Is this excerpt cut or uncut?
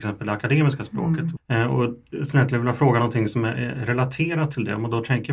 cut